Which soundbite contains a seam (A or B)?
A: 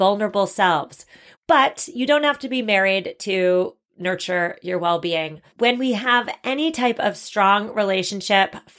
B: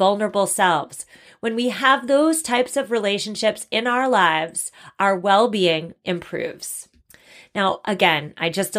A